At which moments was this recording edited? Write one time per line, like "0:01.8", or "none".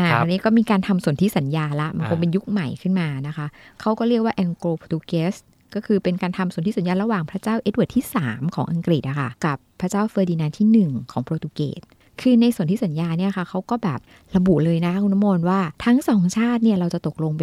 0:09.4
0:15.7